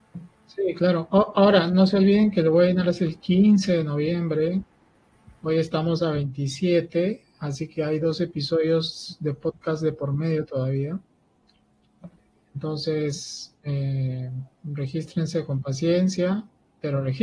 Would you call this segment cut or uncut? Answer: uncut